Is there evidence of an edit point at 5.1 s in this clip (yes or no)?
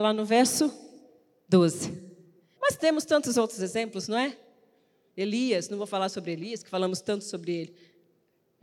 yes